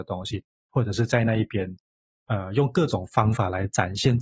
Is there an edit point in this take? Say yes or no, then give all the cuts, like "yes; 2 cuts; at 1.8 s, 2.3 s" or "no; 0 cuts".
no; 0 cuts